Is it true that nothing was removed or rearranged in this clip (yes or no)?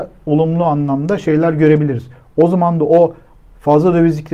yes